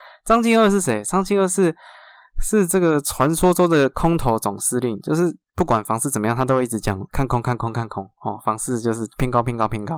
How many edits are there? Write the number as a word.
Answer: zero